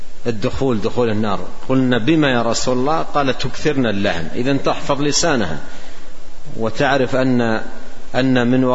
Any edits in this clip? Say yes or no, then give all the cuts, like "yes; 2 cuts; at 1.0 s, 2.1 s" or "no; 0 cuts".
no; 0 cuts